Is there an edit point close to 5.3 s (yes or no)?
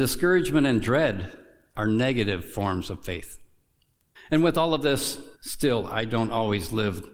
yes